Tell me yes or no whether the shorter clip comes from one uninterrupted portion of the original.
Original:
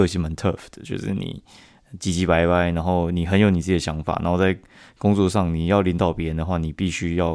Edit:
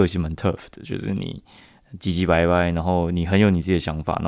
yes